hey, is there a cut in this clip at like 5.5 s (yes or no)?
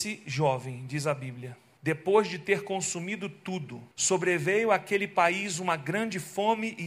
no